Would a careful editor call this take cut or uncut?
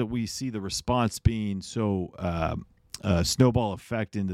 uncut